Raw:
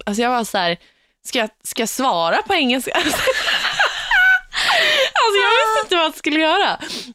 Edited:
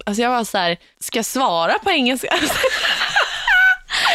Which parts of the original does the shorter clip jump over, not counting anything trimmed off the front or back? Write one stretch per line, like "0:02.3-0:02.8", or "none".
0:00.9-0:01.6